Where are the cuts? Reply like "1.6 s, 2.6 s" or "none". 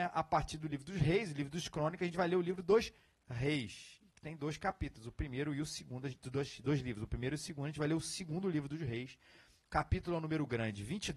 none